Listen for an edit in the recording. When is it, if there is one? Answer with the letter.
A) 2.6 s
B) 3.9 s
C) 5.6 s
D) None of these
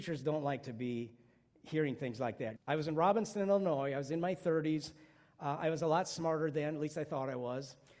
A